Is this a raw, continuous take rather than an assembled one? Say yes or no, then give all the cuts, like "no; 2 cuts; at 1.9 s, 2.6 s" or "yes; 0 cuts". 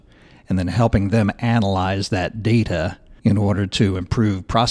no; 1 cut; at 3.2 s